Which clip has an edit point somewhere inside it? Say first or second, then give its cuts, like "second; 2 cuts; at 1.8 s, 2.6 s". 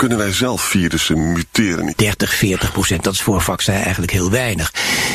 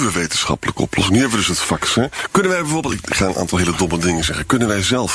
first; 1 cut; at 1.9 s